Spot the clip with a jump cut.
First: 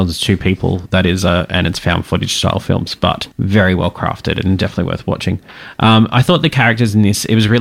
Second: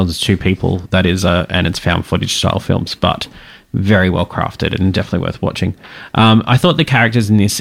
first; 1 cut; at 3.3 s

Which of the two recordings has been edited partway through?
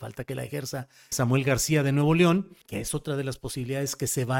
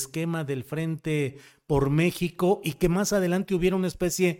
first; 2 cuts; at 1.1 s, 2.6 s

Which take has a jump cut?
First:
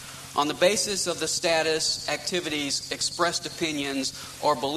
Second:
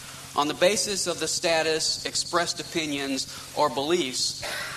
second; 1 cut; at 2.0 s

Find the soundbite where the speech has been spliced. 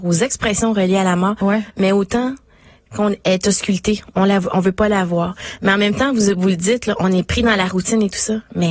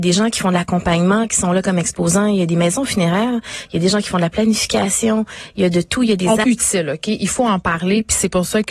second; 1 cut; at 6.4 s

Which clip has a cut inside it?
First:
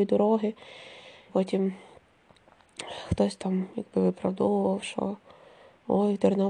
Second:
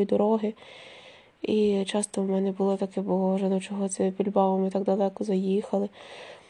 first; 1 cut; at 1.3 s

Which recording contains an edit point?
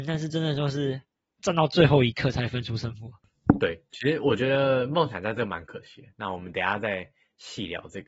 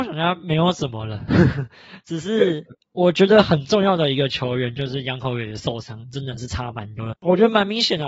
second; 1 cut; at 7.1 s

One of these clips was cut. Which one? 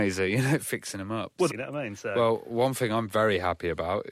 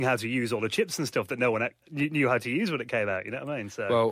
first; 1 cut; at 1.5 s

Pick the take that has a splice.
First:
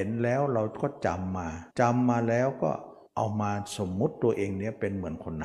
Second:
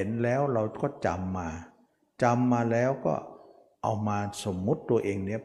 first; 2 cuts; at 1.7 s, 3.1 s

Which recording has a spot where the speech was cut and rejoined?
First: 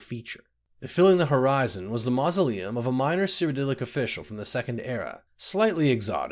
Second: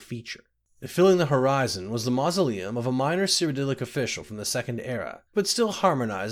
second; 1 cut; at 5.3 s

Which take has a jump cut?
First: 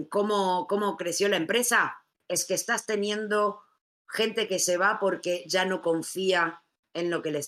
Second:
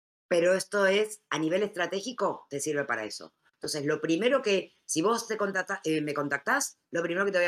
first; 1 cut; at 2.1 s

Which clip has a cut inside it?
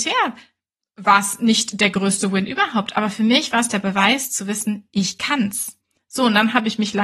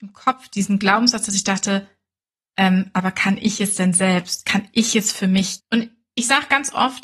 second; 1 cut; at 5.6 s

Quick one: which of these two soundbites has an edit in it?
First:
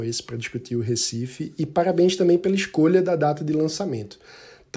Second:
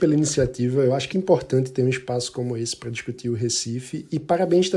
second; 1 cut; at 1.1 s

